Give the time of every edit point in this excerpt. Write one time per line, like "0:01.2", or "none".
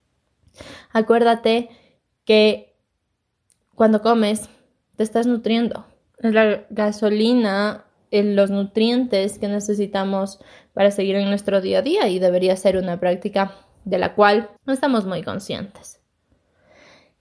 0:06.1
0:14.6